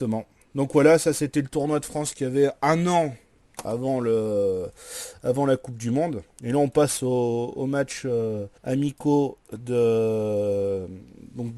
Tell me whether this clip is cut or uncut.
cut